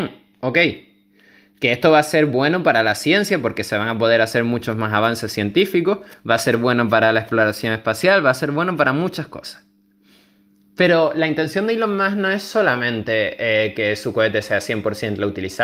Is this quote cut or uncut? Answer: uncut